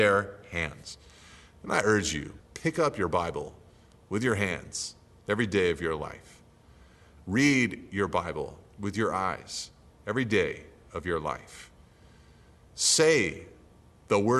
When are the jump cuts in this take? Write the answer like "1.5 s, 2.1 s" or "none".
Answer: 2.4 s